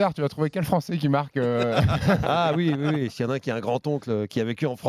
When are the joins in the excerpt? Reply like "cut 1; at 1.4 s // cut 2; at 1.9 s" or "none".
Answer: cut 1; at 2.2 s